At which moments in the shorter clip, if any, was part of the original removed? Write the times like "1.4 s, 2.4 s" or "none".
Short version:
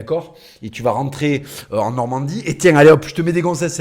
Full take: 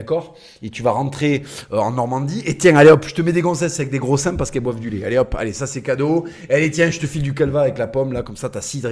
none